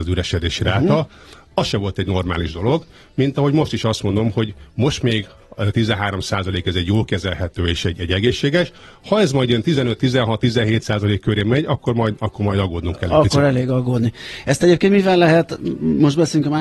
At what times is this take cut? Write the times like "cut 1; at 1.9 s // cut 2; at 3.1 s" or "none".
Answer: none